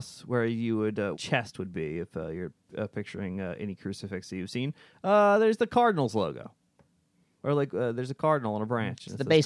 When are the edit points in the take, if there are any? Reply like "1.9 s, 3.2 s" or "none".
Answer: 1.1 s